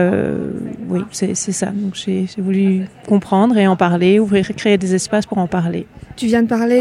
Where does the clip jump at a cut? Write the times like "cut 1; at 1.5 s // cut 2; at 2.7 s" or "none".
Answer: none